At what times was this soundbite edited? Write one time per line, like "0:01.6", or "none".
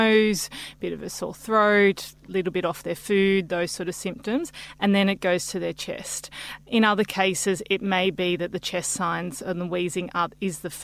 none